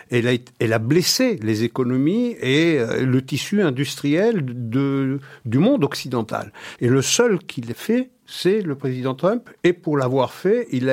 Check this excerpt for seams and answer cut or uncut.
cut